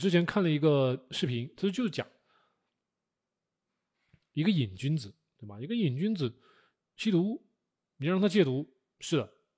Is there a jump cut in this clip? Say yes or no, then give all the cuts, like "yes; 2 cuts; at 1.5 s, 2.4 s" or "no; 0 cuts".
no; 0 cuts